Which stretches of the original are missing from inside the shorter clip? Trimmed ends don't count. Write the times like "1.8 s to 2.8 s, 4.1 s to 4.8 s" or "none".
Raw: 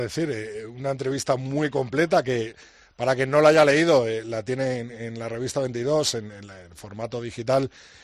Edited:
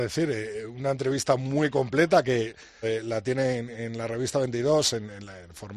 2.8 s to 4.0 s